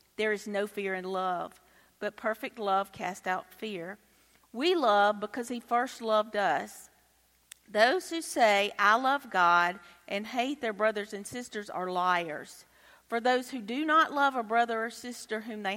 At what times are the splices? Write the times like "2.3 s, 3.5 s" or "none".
4.4 s